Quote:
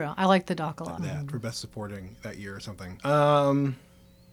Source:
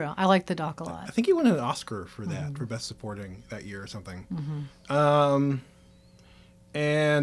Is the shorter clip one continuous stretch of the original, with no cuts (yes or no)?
no